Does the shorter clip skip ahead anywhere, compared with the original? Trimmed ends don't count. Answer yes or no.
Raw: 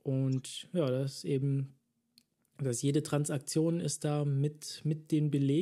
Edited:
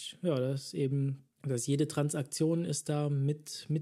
yes